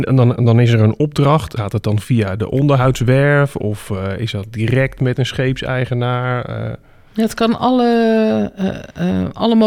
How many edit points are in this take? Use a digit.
1